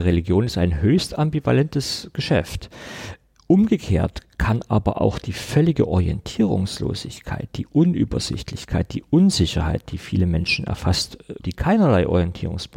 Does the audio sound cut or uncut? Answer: cut